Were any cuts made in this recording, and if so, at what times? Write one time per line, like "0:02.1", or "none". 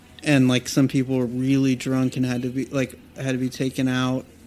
none